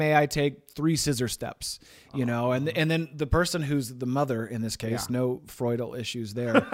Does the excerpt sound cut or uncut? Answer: uncut